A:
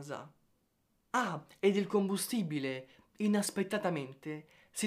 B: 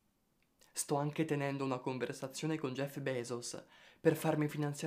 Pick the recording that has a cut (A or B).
A